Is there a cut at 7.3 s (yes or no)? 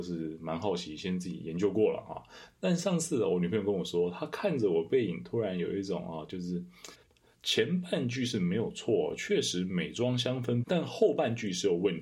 yes